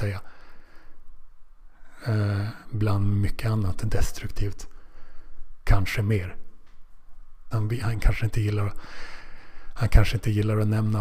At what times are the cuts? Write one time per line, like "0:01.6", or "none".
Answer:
0:05.6
0:07.5